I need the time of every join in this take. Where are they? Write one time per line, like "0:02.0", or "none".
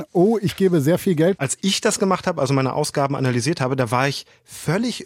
0:01.4

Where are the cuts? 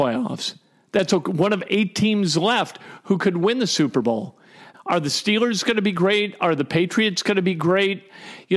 0:04.7

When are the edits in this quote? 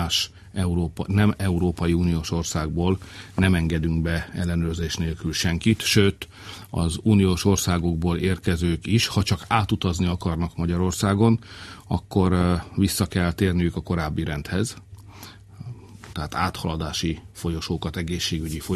0:16.1

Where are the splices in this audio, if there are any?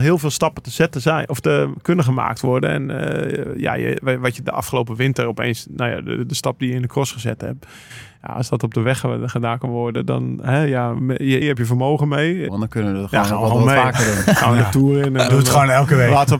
0:11.4
0:12.5

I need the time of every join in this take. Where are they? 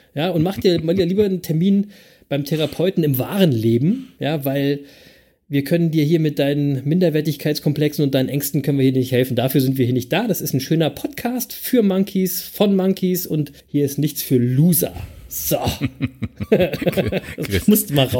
0:13.6

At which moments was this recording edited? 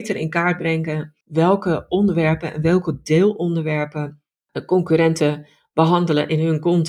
0:01.2

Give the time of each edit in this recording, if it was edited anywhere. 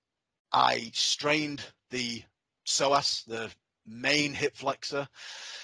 none

